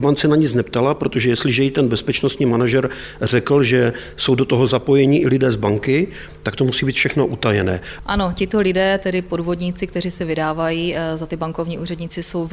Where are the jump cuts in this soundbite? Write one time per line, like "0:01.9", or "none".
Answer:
none